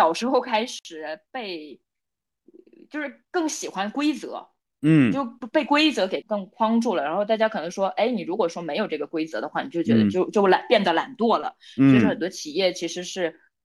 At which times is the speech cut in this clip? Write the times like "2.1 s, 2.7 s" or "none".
6.2 s